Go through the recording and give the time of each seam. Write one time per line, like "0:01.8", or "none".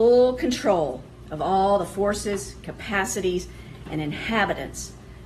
none